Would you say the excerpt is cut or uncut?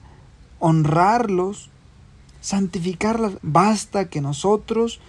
cut